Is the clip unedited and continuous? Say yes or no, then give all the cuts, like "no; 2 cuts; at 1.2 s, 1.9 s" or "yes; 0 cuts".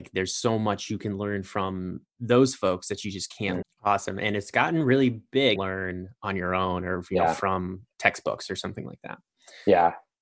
no; 2 cuts; at 3.6 s, 5.6 s